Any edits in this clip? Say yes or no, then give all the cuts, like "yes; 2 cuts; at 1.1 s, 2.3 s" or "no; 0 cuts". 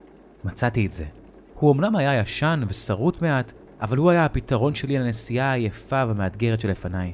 yes; 1 cut; at 1.5 s